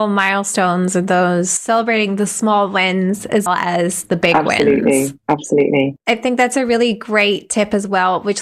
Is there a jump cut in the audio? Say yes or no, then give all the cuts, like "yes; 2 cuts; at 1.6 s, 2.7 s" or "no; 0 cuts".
yes; 1 cut; at 3.5 s